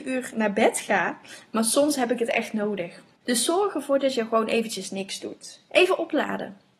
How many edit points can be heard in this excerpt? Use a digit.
2